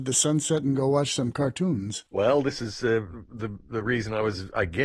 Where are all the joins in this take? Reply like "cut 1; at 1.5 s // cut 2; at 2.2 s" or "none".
cut 1; at 2.1 s